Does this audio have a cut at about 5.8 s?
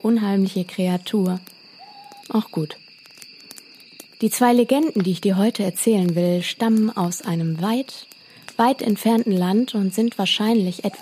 no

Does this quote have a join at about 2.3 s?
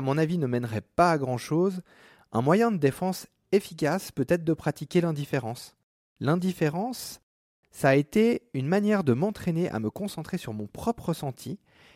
no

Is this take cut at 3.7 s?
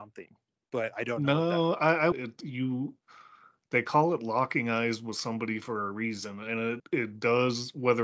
no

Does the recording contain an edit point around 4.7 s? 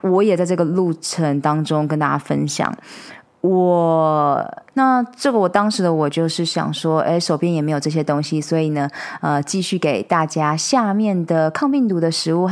yes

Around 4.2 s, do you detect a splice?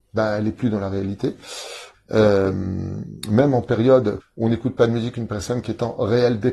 yes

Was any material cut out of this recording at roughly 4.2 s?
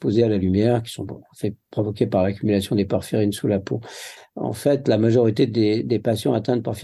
yes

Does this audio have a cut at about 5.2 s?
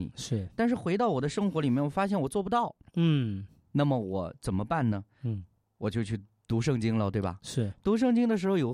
no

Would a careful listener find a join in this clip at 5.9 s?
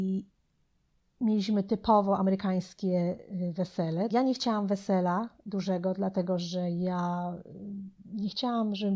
no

